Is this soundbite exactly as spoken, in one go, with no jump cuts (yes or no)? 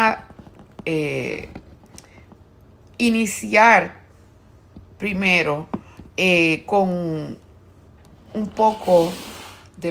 yes